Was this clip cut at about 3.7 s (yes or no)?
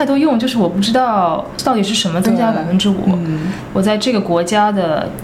yes